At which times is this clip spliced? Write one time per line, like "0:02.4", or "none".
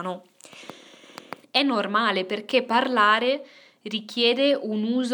0:01.4